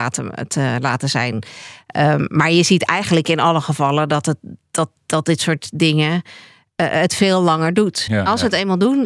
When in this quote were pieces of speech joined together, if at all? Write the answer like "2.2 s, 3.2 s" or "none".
8.1 s